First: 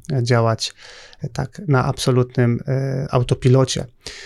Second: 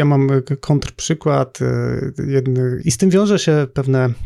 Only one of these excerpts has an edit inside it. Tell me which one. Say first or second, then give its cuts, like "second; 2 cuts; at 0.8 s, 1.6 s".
second; 1 cut; at 2.8 s